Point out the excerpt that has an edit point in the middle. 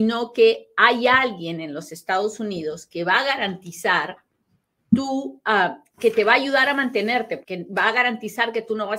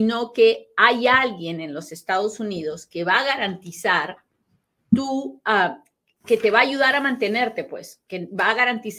first; 2 cuts; at 5.9 s, 7.4 s

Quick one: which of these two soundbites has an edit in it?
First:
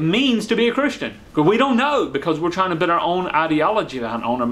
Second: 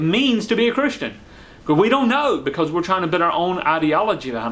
first; 1 cut; at 1.3 s

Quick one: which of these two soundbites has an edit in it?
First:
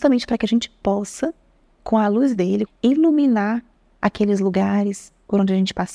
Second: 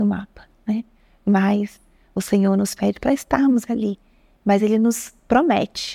first; 1 cut; at 2.7 s

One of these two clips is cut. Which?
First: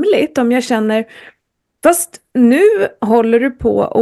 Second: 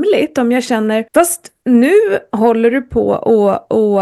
second; 1 cut; at 1.1 s

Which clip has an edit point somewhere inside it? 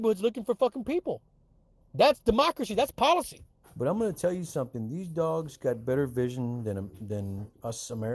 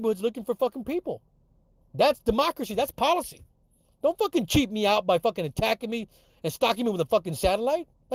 first; 1 cut; at 3.6 s

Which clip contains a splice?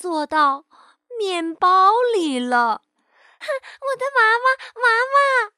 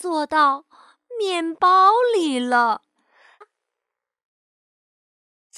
second; 1 cut; at 3.4 s

